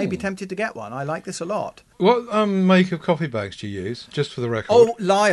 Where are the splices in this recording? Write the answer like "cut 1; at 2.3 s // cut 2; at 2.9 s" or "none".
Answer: cut 1; at 1.9 s